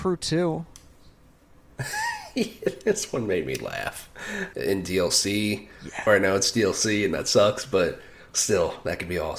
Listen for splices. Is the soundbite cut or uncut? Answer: cut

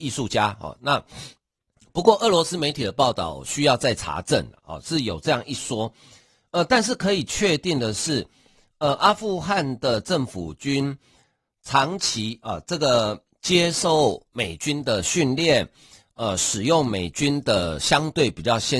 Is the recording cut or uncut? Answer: uncut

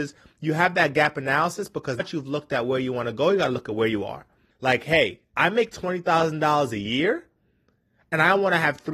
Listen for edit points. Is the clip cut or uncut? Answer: cut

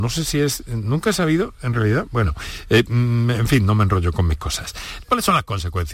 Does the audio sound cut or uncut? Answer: cut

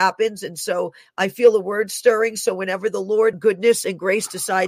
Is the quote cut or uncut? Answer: cut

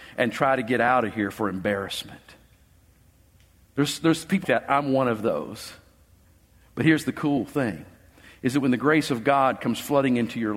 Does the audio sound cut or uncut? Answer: cut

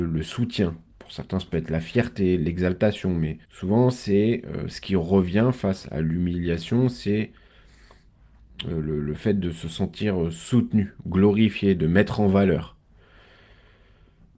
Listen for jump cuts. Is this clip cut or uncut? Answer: cut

